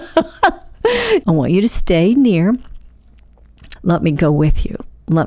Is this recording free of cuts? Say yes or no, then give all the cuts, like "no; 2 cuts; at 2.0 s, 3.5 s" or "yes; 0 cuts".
no; 2 cuts; at 1.2 s, 3.8 s